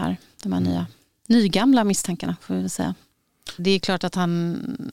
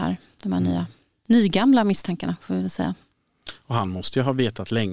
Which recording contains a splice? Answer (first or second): first